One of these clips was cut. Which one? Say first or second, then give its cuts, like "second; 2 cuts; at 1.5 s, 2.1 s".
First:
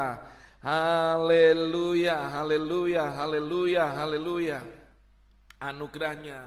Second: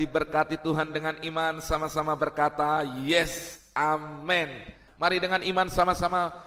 second; 1 cut; at 4.9 s